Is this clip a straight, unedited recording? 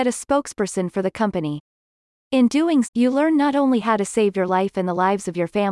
no; 1 cut; at 2.8 s

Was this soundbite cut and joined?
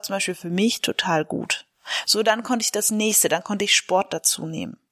no; 0 cuts

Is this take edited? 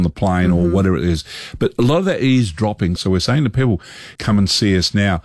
yes; 2 cuts; at 3.0 s, 4.2 s

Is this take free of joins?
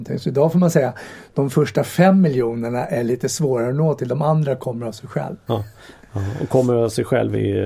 no; 1 cut; at 5.5 s

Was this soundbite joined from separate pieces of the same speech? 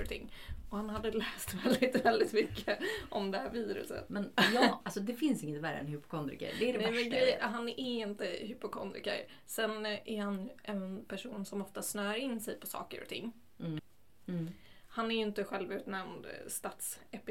yes; 2 cuts; at 4.1 s, 14.2 s

